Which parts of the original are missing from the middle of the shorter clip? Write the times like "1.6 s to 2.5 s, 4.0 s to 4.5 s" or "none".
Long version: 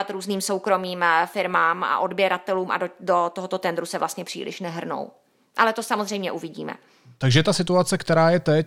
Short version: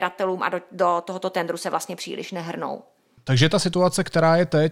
5.5 s to 7.1 s